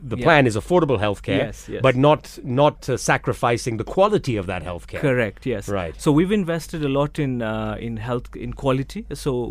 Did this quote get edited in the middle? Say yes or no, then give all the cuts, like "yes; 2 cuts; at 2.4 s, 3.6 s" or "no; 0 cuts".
no; 0 cuts